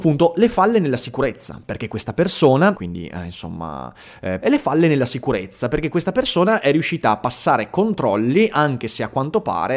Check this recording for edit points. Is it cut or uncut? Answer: cut